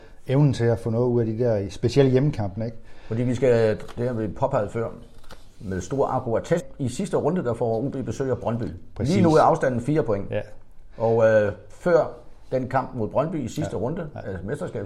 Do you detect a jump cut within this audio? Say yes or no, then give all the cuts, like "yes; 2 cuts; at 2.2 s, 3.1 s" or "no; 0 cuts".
yes; 1 cut; at 6.6 s